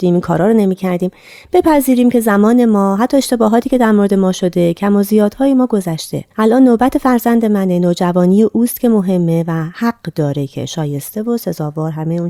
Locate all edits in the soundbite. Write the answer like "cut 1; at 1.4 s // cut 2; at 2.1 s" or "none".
cut 1; at 6.3 s